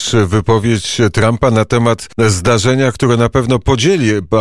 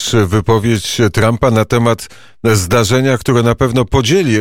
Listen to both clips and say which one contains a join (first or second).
first